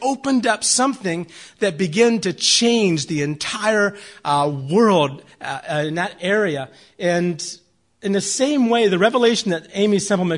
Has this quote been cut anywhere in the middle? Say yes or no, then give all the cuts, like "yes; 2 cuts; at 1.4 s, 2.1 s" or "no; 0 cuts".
no; 0 cuts